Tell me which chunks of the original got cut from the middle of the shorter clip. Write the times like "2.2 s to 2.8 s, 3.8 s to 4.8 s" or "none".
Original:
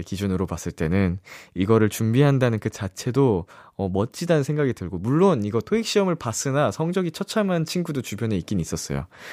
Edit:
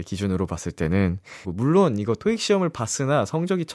1.4 s to 4.9 s

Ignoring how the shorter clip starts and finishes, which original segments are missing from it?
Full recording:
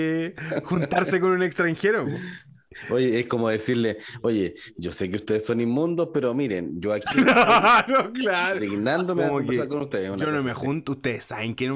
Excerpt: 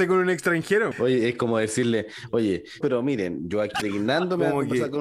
2.0 s to 2.8 s, 4.7 s to 6.1 s, 7.1 s to 8.6 s

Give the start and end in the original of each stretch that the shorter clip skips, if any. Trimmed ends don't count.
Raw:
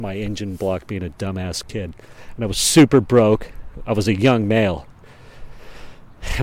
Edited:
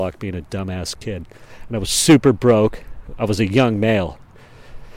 none

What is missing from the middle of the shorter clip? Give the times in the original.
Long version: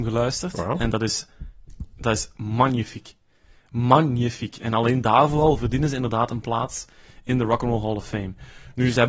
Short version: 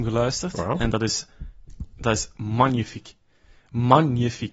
none

